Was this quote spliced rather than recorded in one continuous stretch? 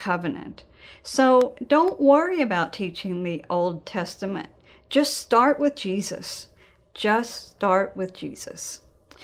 no; 0 cuts

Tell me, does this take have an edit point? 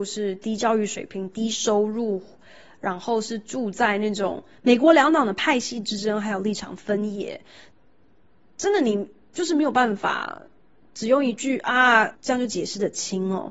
yes; 2 cuts; at 4.5 s, 12.1 s

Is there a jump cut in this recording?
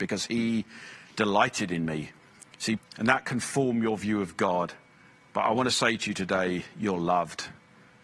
yes; 1 cut; at 2.8 s

